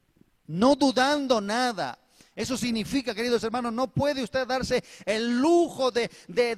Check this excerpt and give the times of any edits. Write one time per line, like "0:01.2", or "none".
none